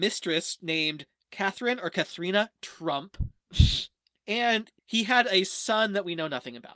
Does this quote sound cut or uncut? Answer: cut